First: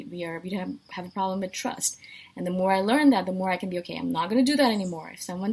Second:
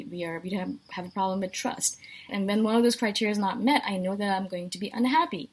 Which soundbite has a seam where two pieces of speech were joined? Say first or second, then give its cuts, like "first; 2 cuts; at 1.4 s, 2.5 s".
second; 1 cut; at 2.3 s